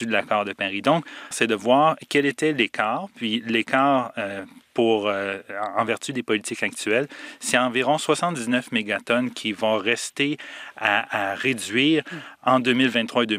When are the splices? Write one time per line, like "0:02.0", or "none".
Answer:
0:01.3